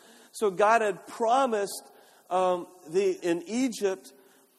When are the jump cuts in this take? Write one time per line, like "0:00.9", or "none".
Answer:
0:03.2